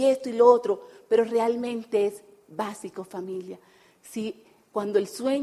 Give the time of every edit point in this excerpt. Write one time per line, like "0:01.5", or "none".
none